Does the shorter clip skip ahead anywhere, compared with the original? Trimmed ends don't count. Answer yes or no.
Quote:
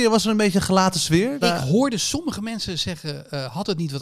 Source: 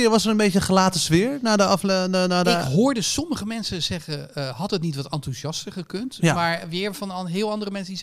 yes